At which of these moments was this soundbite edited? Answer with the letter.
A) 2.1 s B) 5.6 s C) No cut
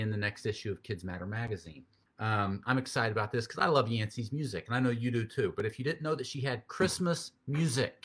A